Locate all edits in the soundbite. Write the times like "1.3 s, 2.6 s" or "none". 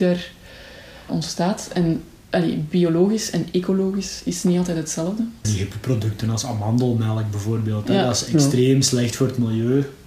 1.1 s, 5.4 s